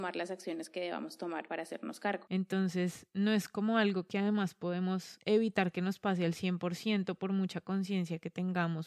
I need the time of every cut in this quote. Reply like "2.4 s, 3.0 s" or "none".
2.3 s